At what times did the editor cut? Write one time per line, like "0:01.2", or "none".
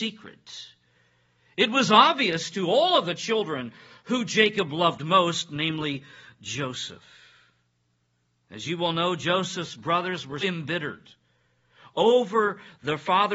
0:10.4